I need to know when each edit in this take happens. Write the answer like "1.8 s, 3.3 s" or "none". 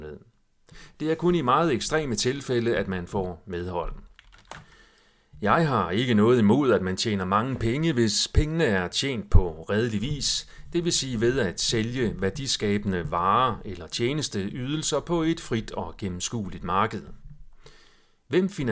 none